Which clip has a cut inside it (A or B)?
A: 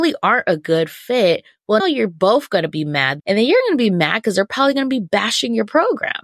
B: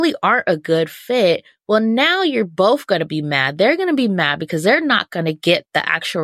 A